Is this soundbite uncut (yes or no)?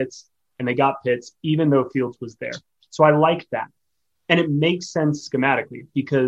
yes